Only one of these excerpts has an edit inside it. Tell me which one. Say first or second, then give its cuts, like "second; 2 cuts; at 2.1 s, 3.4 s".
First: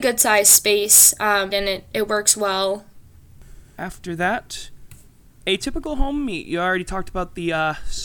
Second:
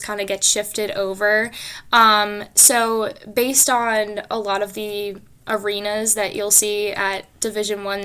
first; 1 cut; at 1.5 s